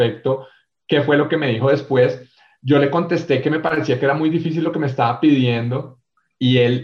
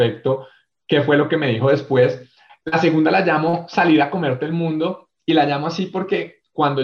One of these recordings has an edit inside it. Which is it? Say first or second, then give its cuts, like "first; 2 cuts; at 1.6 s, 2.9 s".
second; 2 cuts; at 2.5 s, 5.2 s